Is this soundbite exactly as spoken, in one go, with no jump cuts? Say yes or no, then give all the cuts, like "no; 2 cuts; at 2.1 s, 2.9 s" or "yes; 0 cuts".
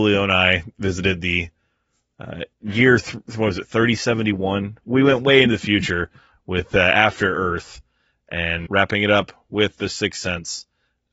no; 2 cuts; at 2.5 s, 8.7 s